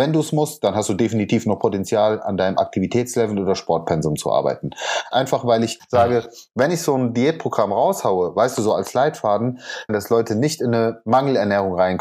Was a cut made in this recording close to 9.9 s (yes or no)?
yes